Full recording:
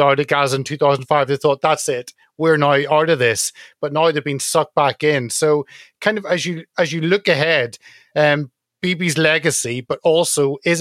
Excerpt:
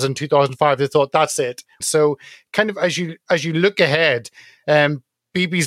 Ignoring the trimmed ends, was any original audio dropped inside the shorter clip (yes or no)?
yes